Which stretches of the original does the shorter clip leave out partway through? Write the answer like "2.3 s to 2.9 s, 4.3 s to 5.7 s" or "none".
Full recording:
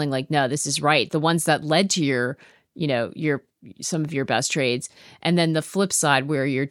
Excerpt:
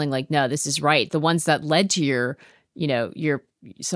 none